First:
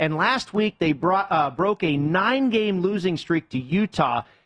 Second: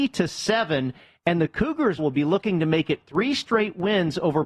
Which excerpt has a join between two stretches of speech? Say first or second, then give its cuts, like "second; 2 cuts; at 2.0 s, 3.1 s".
second; 1 cut; at 2.0 s